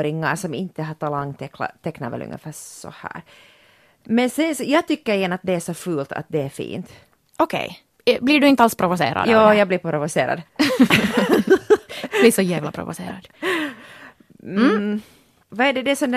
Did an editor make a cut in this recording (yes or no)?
yes